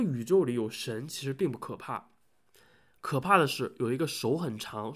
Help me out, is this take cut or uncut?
uncut